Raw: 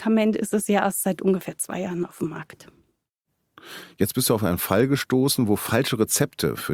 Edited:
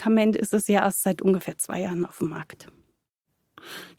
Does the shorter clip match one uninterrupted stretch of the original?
yes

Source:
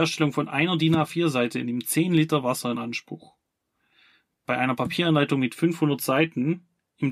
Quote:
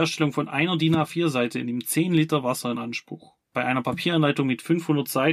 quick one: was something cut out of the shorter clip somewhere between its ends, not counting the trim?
yes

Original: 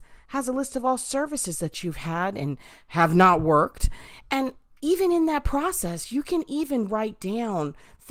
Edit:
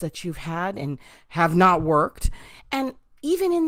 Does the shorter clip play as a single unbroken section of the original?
yes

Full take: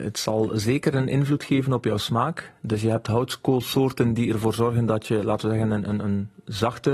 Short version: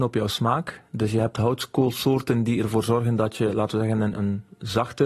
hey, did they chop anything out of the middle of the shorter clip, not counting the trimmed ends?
yes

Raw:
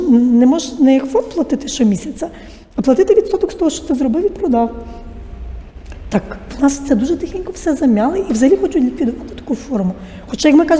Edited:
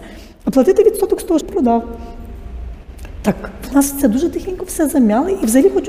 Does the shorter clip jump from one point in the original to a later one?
yes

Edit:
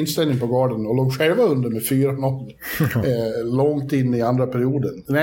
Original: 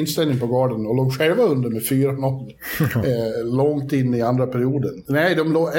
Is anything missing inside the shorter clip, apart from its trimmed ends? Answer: no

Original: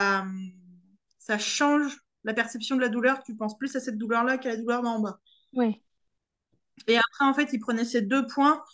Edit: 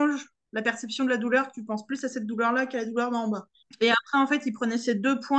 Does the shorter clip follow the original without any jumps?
no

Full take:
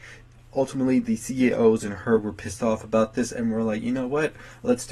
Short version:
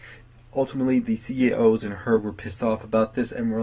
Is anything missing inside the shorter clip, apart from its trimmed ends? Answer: no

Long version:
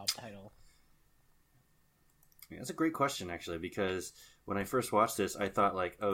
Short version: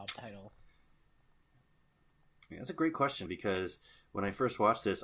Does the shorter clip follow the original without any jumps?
no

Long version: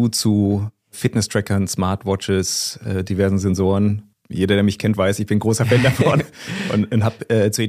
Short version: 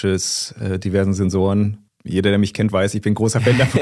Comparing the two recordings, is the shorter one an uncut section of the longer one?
yes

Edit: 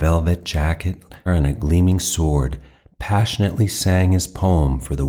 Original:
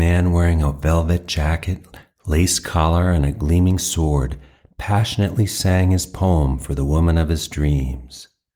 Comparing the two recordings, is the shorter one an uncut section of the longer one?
no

